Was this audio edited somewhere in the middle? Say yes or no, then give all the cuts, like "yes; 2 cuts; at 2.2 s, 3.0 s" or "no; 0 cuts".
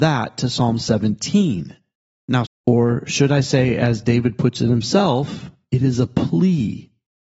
yes; 1 cut; at 2.4 s